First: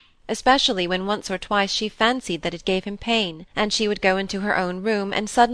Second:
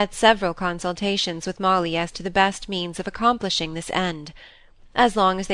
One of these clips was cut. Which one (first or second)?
first